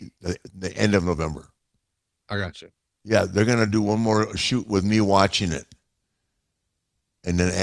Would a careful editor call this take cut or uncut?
uncut